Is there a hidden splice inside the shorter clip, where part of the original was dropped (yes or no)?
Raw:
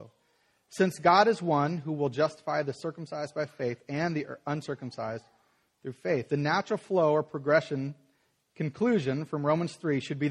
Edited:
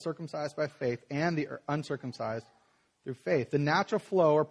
no